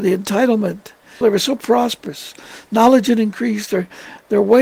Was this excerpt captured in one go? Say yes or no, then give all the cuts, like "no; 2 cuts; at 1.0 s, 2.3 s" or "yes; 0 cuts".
no; 1 cut; at 1.2 s